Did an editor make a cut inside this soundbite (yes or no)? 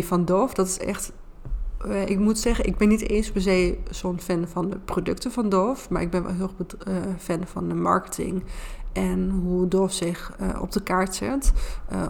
no